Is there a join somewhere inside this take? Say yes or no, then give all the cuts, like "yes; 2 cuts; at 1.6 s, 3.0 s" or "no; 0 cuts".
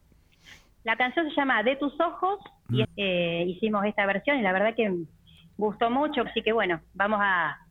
yes; 2 cuts; at 2.8 s, 6.3 s